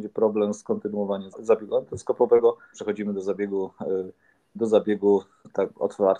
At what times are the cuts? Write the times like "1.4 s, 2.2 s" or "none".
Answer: 1.3 s, 2.7 s, 4.6 s